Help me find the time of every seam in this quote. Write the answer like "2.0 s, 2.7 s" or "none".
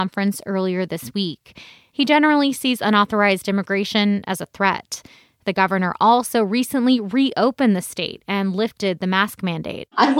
none